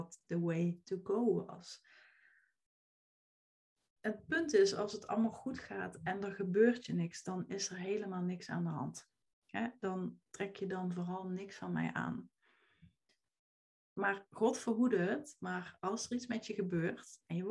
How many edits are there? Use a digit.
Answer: 0